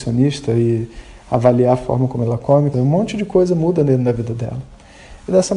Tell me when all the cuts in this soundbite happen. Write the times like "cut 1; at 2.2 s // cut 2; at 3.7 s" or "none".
cut 1; at 2.7 s